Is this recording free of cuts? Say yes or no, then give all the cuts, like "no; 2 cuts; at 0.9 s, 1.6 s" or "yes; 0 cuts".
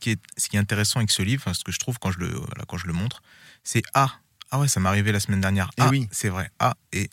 yes; 0 cuts